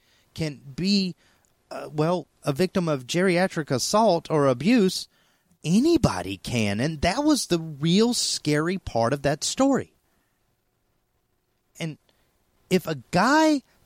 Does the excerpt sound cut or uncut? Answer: cut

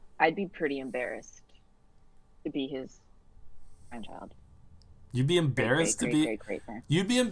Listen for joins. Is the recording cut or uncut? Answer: uncut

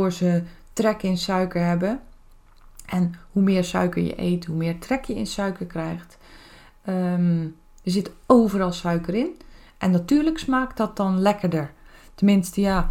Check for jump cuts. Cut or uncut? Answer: uncut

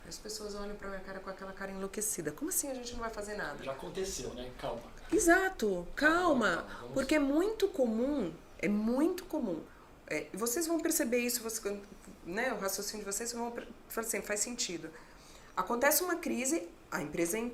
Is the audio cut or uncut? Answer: uncut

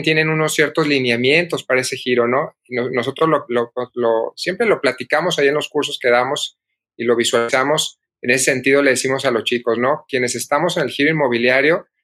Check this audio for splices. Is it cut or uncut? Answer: uncut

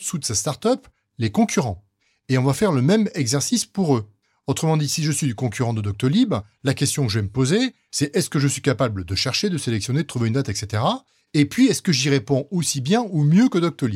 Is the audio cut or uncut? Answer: uncut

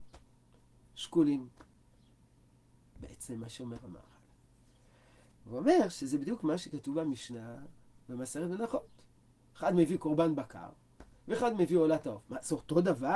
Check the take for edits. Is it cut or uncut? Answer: cut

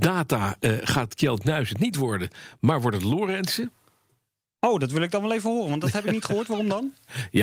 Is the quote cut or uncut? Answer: uncut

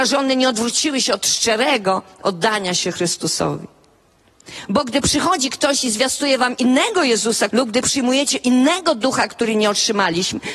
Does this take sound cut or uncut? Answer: cut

